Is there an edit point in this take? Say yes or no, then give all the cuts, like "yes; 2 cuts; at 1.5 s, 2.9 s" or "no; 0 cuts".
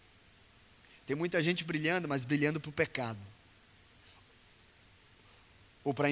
no; 0 cuts